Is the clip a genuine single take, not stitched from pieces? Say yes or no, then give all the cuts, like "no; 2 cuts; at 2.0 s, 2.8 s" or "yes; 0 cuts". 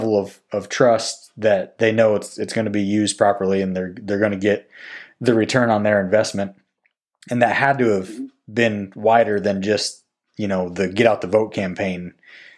yes; 0 cuts